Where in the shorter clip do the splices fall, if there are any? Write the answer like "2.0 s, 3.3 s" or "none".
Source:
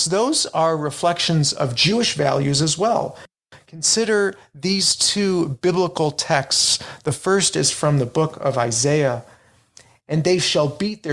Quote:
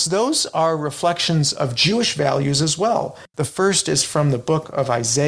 3.3 s

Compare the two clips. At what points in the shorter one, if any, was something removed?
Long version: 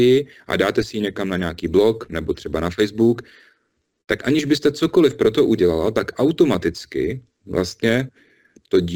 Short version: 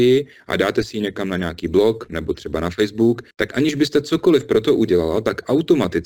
3.3 s

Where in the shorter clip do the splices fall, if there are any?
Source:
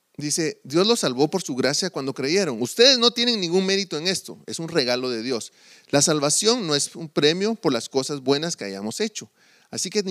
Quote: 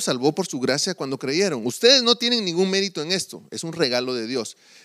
none

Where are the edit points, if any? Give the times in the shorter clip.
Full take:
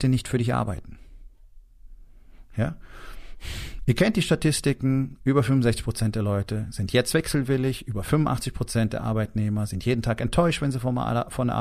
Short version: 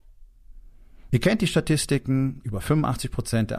1.1 s, 2.4 s

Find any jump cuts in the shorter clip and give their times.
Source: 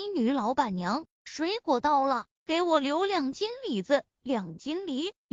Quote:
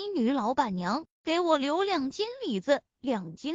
1.2 s

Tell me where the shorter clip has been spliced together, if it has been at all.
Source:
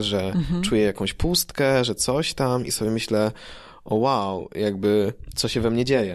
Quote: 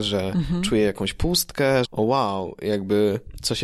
1.8 s

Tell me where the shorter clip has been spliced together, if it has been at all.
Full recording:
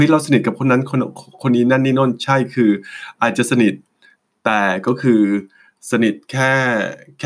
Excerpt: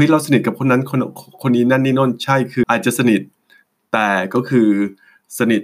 2.6 s

